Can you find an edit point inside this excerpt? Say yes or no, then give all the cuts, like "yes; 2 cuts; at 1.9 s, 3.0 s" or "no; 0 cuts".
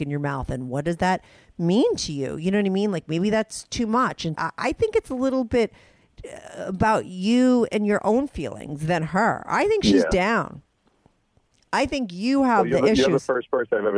yes; 1 cut; at 4.4 s